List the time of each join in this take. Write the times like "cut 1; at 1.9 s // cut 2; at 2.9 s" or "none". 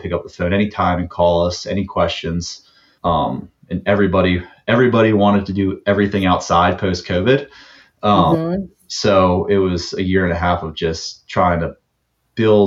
cut 1; at 3.0 s